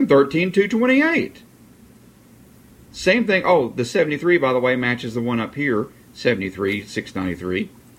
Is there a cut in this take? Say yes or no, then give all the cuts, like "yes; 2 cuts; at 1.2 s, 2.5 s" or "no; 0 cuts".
no; 0 cuts